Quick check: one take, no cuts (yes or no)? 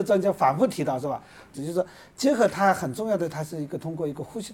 no